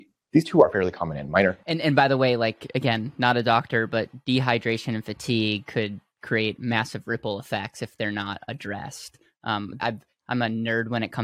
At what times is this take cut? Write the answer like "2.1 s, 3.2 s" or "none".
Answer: 9.8 s